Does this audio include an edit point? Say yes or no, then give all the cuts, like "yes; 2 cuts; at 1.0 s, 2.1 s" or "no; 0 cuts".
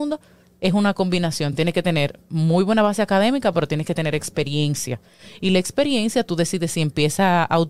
no; 0 cuts